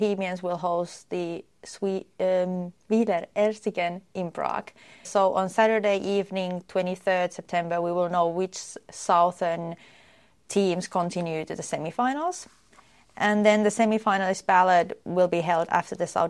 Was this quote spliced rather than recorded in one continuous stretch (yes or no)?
yes